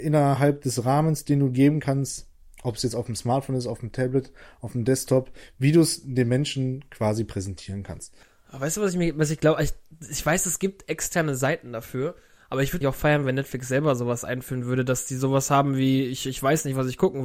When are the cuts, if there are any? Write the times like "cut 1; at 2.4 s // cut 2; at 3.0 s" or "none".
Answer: cut 1; at 12.8 s